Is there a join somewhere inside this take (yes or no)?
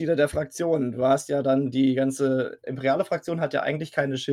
no